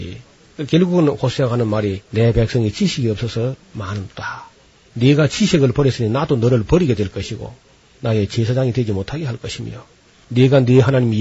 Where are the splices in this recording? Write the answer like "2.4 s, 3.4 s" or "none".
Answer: 2.1 s